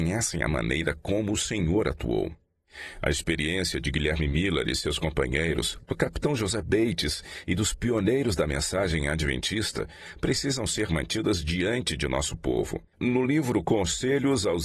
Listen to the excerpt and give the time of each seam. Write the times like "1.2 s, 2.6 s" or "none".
12.9 s